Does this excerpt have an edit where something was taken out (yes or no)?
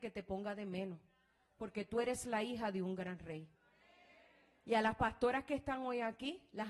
no